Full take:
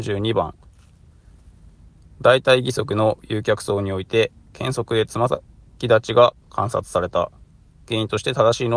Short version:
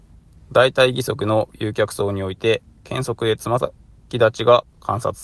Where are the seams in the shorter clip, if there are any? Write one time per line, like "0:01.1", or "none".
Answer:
none